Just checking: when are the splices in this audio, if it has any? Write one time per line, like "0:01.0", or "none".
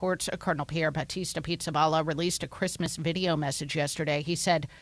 none